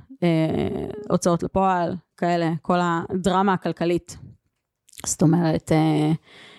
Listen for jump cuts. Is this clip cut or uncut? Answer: uncut